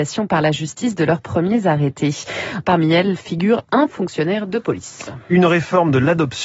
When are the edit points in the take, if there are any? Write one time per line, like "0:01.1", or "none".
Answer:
0:02.6